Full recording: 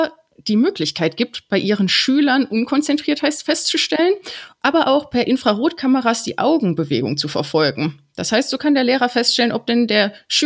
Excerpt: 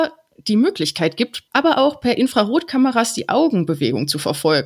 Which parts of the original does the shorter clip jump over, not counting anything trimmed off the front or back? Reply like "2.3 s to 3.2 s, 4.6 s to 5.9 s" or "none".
1.5 s to 4.6 s